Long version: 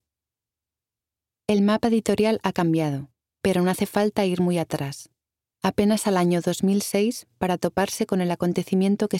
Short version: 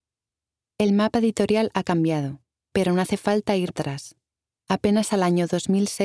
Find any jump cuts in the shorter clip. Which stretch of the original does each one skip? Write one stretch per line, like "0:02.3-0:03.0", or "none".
0:04.4-0:04.6

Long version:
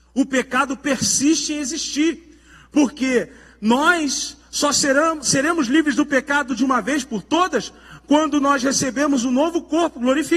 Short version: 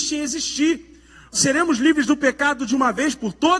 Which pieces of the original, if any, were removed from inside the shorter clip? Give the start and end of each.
0:02.7-0:05.2

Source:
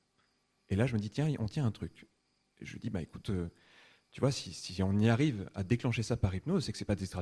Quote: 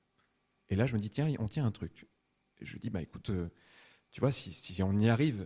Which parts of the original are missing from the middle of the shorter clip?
none

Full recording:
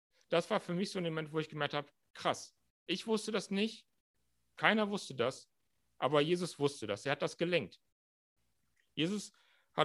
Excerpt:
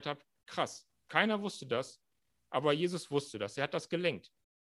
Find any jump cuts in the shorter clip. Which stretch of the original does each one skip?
0:02.7-0:04.5

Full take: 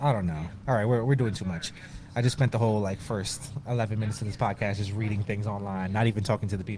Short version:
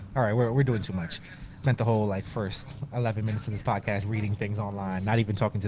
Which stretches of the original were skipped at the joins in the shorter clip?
0:02.1-0:02.4
0:04.8-0:04.9

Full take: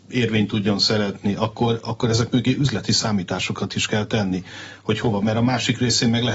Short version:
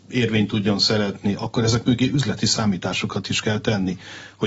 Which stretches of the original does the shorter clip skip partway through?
0:01.4-0:01.8

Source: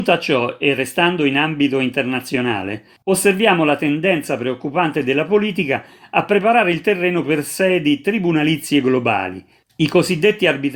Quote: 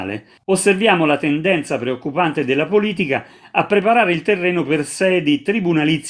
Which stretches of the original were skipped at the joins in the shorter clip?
none

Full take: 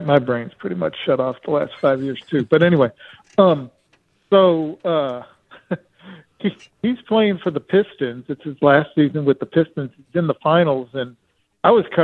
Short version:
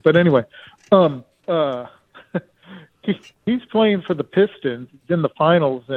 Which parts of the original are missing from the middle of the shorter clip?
0:03.9-0:04.8
0:08.3-0:09.9

